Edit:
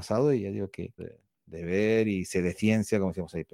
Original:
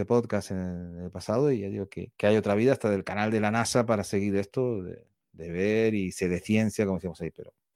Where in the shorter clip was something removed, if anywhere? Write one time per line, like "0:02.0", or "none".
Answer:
0:01.0